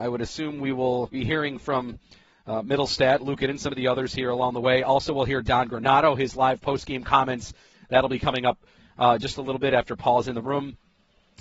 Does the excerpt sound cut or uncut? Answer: uncut